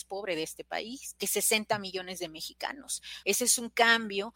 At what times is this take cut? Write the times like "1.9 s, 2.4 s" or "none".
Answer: 3.2 s